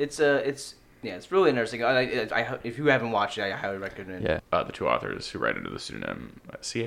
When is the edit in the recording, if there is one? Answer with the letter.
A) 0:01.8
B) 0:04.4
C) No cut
B